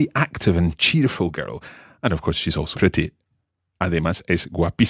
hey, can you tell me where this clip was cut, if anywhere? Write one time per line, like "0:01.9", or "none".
0:02.7